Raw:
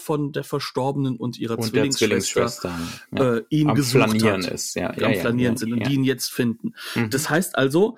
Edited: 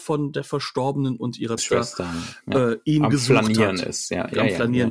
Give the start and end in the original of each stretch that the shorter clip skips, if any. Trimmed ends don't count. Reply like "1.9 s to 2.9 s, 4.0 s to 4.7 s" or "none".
1.6 s to 2.2 s

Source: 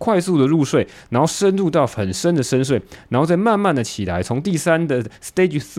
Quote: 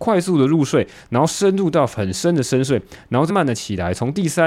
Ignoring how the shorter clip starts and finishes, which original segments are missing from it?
3.3 s to 3.6 s

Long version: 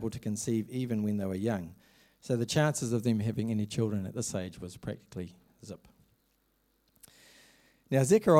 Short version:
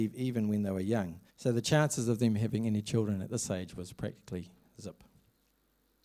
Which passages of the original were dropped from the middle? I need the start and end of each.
1.8 s to 2.1 s

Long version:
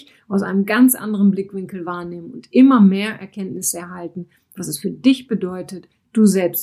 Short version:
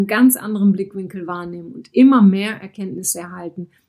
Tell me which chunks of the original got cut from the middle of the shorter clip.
none

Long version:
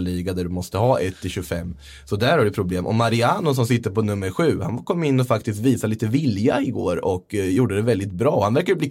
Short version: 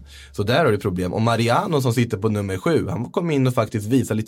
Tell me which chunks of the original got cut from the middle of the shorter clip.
none

